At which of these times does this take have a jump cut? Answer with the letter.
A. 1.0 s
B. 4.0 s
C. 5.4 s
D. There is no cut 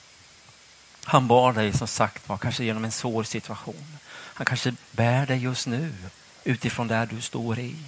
D